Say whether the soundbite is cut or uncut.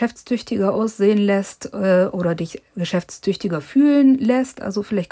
uncut